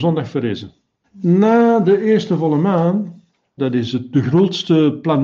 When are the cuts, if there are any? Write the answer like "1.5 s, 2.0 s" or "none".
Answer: 1.0 s, 3.6 s